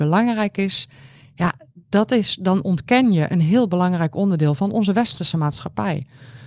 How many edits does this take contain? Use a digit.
0